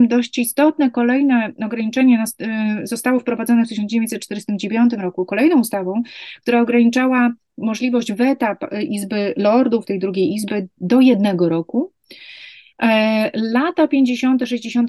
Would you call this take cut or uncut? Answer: uncut